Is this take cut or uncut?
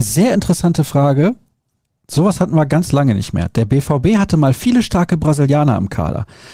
uncut